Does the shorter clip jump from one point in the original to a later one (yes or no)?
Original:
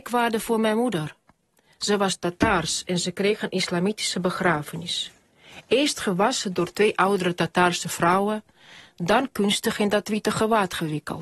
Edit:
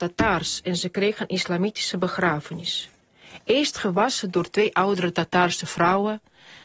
no